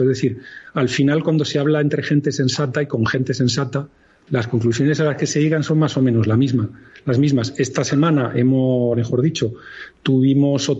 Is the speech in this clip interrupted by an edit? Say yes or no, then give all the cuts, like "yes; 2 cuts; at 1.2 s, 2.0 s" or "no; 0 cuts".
yes; 2 cuts; at 4.3 s, 8.9 s